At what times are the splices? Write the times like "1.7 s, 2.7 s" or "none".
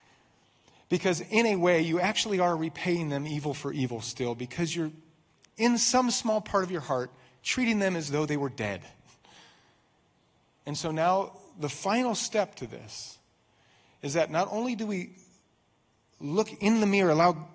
none